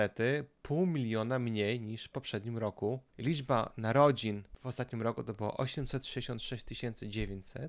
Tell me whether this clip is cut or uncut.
cut